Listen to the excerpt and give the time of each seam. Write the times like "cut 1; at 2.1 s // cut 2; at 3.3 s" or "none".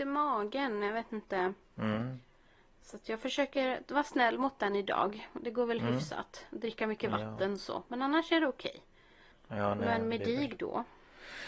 cut 1; at 1.6 s // cut 2; at 9.3 s